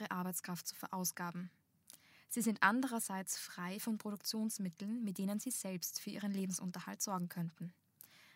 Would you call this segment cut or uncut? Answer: uncut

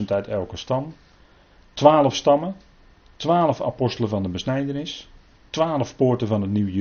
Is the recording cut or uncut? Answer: uncut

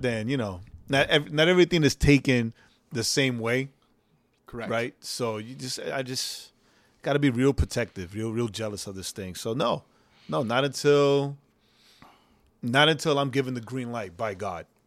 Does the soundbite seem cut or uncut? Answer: uncut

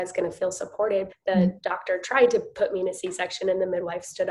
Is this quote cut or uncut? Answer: cut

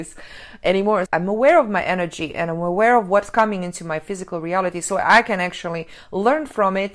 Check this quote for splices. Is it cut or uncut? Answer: cut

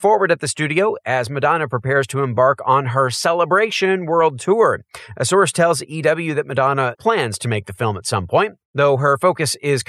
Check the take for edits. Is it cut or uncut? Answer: cut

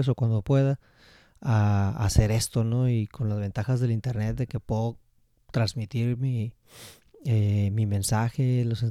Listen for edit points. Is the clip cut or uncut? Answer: uncut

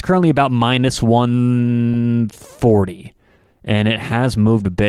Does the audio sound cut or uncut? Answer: uncut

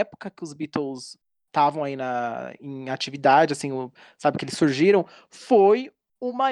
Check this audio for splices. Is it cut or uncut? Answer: uncut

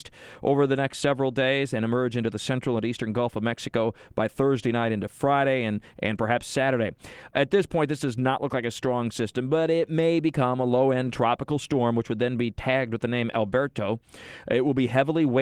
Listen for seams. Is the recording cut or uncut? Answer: uncut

